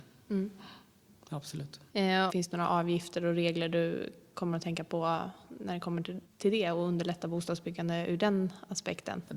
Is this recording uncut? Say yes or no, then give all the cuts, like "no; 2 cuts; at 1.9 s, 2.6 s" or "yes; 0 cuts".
no; 1 cut; at 2.3 s